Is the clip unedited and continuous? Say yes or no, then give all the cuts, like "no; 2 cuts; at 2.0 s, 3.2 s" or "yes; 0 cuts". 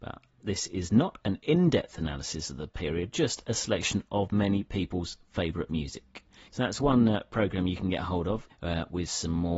no; 2 cuts; at 6.5 s, 8.5 s